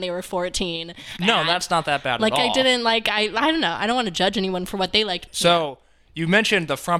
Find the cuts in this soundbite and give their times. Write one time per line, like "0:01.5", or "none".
0:01.2
0:05.3